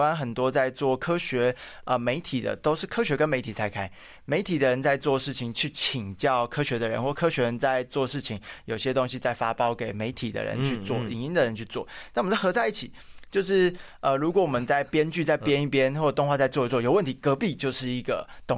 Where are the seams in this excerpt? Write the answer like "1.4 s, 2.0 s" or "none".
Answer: none